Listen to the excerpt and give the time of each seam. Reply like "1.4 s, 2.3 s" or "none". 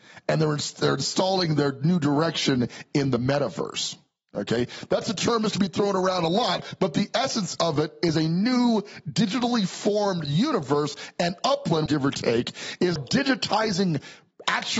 11.9 s, 13.0 s